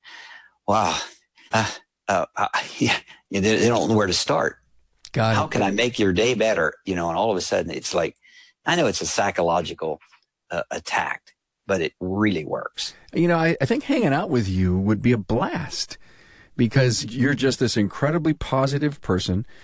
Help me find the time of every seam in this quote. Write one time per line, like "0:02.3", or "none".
0:01.5
0:17.0